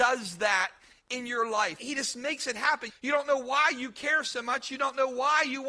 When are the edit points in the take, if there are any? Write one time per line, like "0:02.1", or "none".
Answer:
0:02.9